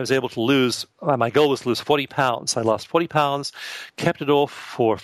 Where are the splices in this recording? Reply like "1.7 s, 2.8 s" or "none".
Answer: none